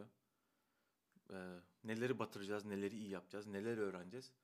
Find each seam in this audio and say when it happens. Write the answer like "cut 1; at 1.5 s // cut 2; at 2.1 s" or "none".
none